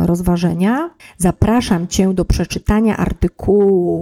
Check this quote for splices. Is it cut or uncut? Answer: cut